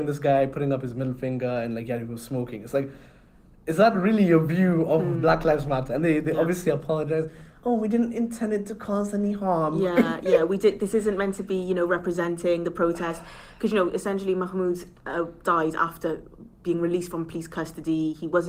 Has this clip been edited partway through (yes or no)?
no